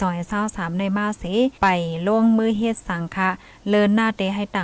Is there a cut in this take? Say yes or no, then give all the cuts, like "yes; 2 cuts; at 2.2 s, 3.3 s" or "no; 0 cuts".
yes; 1 cut; at 1.6 s